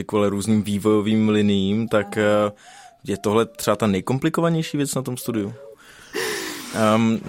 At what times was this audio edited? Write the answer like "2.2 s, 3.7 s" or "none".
5.7 s